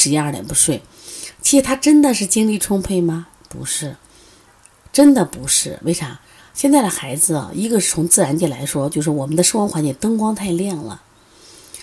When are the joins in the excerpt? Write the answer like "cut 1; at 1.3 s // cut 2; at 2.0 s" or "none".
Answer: none